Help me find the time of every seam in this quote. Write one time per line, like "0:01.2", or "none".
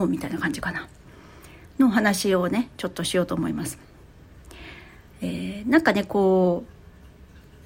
none